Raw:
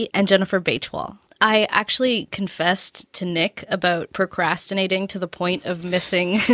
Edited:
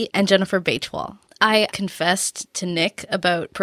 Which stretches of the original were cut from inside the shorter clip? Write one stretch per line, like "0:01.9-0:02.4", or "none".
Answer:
0:01.7-0:02.3